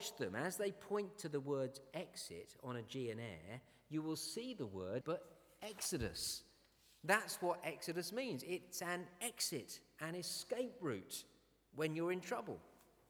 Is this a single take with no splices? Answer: no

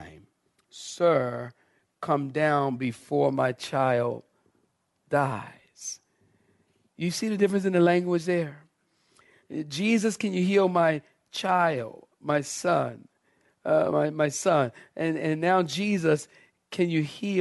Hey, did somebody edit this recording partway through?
no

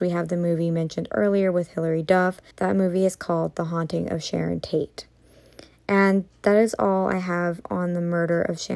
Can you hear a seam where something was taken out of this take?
yes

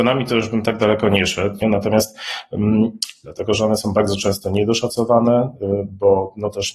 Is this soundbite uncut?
no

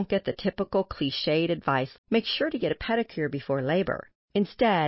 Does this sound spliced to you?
yes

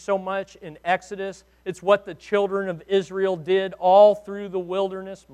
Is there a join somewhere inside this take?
no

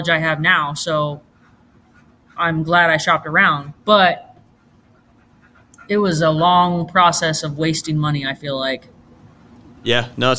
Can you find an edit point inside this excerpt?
no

